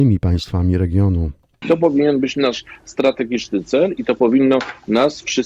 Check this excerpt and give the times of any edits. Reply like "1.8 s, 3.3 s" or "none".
1.6 s